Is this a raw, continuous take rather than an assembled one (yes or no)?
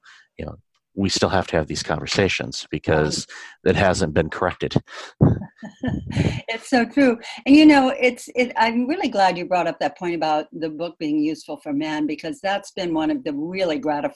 yes